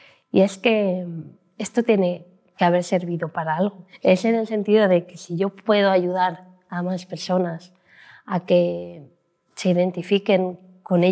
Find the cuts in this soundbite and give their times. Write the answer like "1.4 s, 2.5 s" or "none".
none